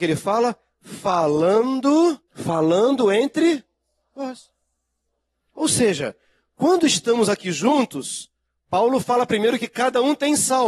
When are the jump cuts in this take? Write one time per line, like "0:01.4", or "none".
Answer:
0:02.3